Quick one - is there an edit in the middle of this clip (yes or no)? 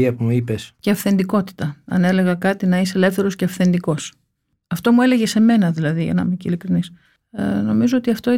no